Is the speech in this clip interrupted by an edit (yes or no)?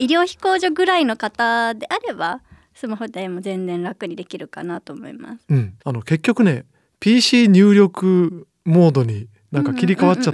yes